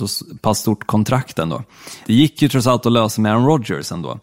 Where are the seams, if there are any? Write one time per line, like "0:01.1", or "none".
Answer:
0:02.0

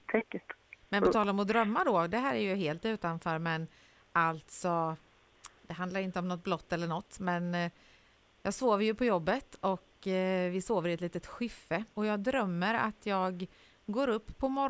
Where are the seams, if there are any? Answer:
0:11.9

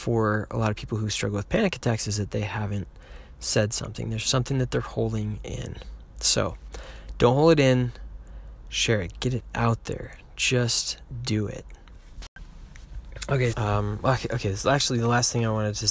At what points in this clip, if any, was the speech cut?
0:09.1
0:13.5

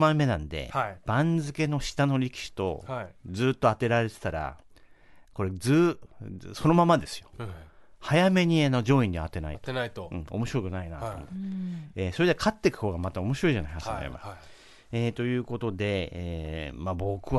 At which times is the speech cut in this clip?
none

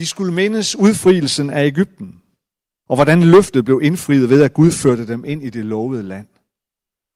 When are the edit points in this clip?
0:02.9

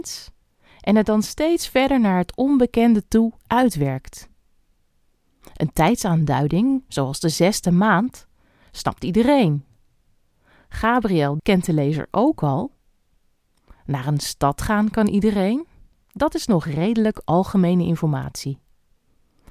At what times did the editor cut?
0:11.4
0:15.9

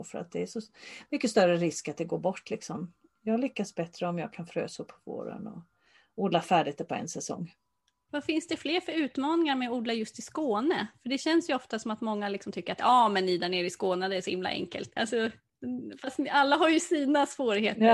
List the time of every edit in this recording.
0:15.0

